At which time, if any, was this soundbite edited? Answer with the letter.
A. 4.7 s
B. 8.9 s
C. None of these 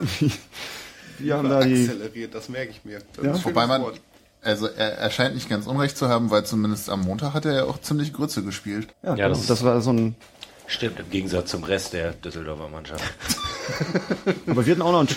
B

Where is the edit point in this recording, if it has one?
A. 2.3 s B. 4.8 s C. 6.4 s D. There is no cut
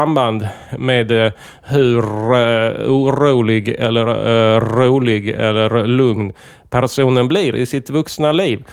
D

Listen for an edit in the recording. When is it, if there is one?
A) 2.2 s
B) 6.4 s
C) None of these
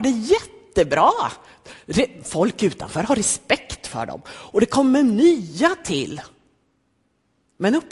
C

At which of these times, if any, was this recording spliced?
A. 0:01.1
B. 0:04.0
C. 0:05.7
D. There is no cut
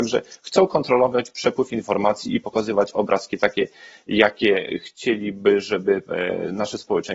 D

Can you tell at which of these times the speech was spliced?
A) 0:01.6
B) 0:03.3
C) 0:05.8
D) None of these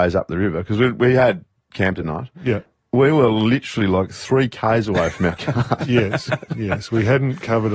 D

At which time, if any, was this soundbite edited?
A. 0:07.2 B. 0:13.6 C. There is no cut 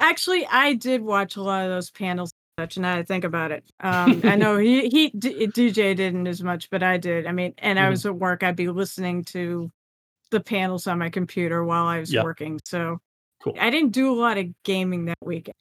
B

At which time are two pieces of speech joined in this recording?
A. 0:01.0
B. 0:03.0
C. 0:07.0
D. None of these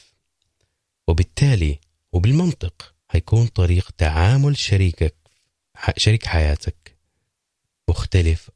B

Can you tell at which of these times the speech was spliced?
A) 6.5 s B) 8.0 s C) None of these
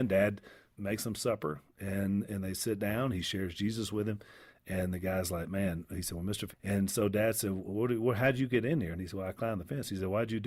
A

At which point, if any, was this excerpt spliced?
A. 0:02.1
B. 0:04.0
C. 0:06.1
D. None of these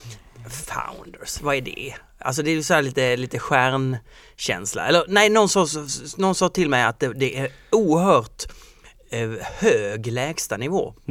D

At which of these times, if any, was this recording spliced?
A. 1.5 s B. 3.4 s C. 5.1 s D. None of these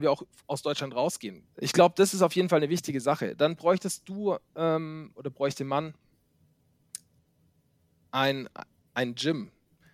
A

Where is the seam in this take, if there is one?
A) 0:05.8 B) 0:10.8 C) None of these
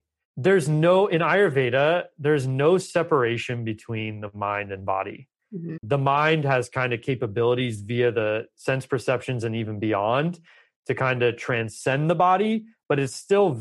A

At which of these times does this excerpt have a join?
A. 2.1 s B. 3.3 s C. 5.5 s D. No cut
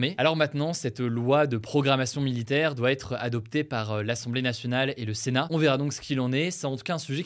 D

